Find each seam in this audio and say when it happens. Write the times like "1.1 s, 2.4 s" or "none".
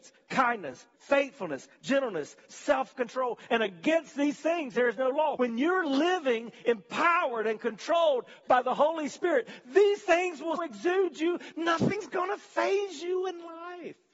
0.9 s, 5.4 s, 10.6 s